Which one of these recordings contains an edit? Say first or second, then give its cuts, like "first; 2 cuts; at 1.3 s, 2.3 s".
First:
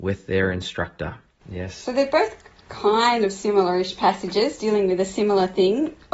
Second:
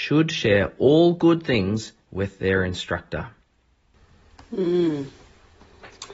first; 1 cut; at 1.4 s